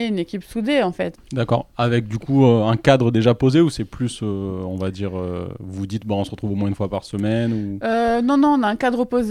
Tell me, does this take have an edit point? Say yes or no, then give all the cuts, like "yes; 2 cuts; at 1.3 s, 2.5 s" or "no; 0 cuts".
yes; 1 cut; at 1.1 s